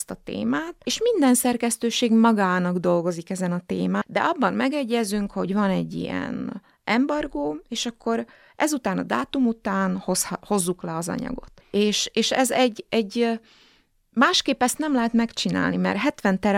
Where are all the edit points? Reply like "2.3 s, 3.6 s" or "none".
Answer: 4.0 s, 11.6 s